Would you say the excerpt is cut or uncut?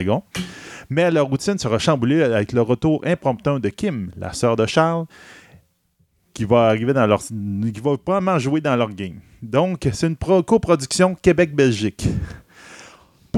uncut